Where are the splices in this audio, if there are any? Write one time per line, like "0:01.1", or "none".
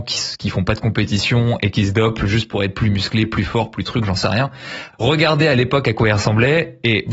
0:04.9